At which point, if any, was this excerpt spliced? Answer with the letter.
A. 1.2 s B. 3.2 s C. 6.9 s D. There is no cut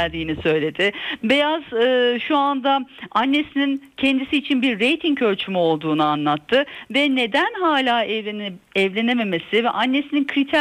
D